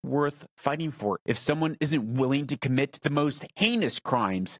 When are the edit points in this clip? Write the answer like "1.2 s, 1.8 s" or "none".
1.2 s